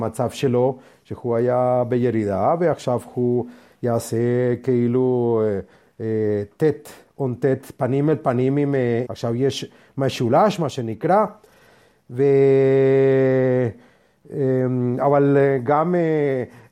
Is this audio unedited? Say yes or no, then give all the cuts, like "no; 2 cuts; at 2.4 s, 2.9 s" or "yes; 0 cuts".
no; 1 cut; at 9.1 s